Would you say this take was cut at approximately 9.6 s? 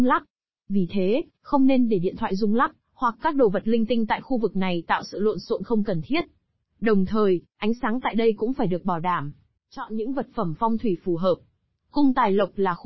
yes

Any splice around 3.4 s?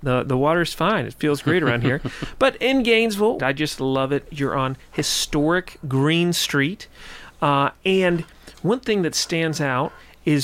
yes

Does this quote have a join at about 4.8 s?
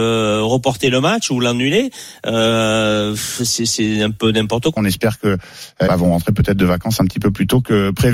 yes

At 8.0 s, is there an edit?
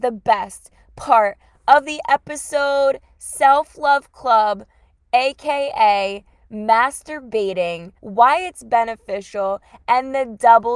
yes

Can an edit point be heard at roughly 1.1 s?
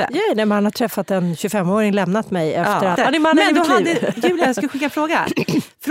no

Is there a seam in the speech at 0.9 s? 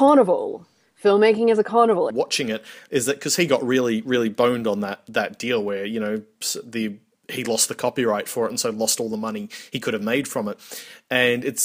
no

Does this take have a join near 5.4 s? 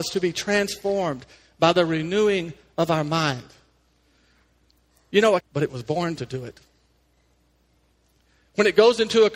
yes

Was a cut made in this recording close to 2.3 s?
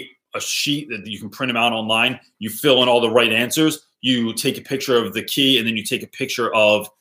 no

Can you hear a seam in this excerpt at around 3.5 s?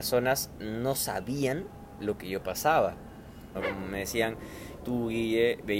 yes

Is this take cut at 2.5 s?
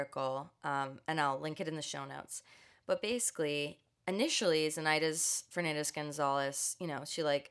no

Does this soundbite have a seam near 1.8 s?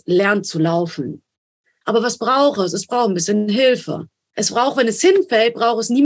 yes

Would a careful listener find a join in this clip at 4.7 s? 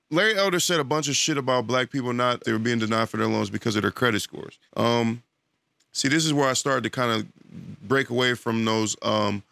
yes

